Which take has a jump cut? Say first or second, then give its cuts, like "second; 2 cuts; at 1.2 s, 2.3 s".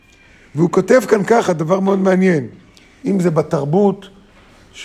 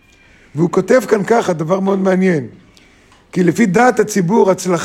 first; 1 cut; at 3.0 s